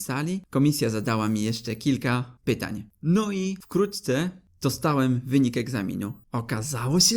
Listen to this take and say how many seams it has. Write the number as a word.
zero